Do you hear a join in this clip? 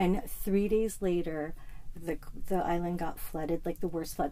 yes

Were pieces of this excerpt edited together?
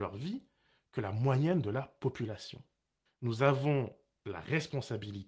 yes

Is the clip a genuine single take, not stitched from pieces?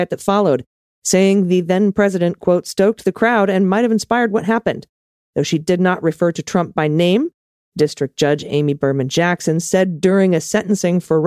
yes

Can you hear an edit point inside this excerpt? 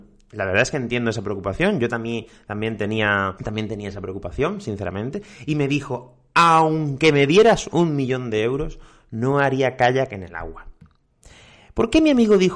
no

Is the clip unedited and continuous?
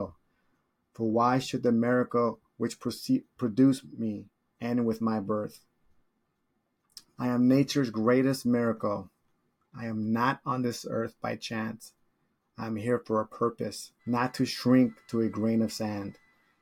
no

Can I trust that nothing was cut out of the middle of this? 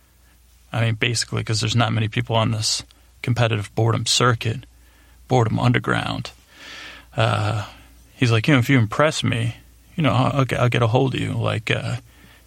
yes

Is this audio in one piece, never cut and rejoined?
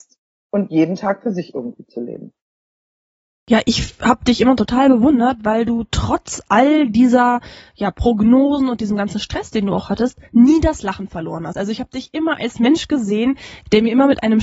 yes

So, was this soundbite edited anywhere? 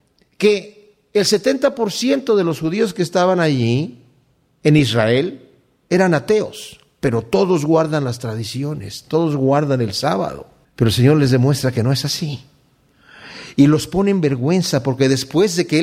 yes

